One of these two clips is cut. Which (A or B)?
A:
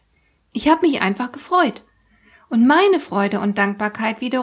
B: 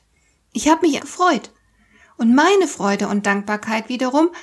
B